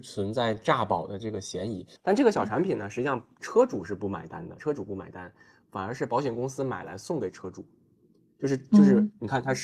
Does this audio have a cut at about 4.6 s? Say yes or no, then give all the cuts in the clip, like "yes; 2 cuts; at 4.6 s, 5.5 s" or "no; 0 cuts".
yes; 2 cuts; at 2.0 s, 4.6 s